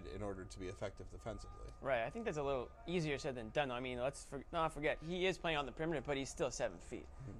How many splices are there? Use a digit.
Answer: 1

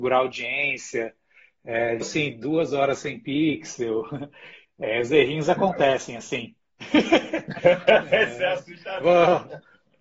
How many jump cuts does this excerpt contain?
1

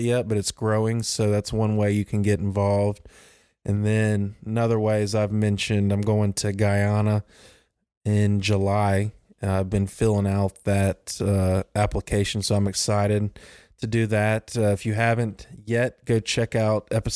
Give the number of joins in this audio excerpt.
0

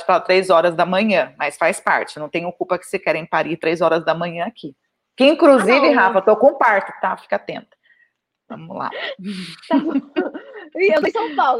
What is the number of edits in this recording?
0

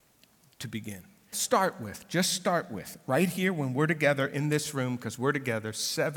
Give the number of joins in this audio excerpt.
1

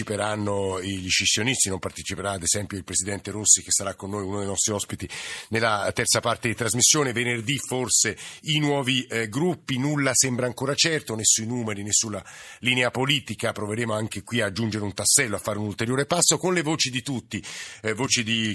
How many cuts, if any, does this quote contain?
0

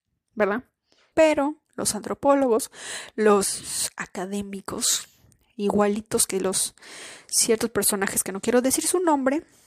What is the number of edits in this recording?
1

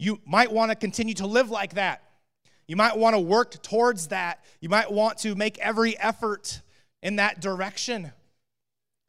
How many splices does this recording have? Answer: 0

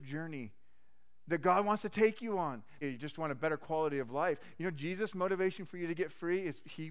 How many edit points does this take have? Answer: 1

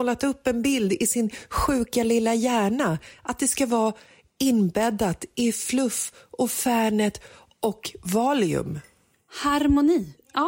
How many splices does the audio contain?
0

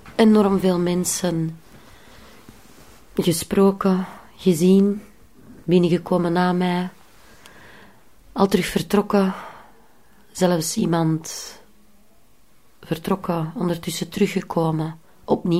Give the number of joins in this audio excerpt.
0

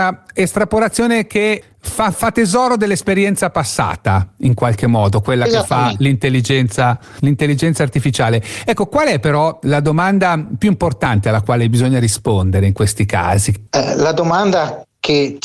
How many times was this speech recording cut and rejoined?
1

